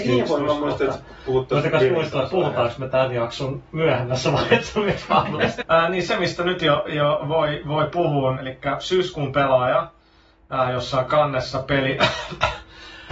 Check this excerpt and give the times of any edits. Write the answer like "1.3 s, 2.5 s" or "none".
5.6 s, 8.3 s

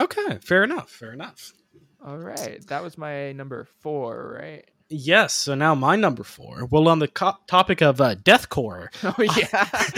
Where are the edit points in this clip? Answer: 3.7 s

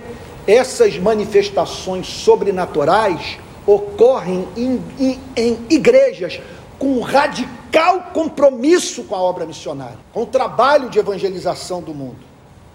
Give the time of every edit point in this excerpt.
5.3 s, 10.0 s

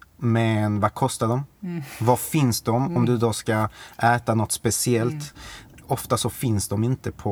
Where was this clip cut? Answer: 5.3 s

